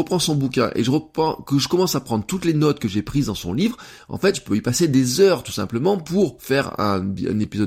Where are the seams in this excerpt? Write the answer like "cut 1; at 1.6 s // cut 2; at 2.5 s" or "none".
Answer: none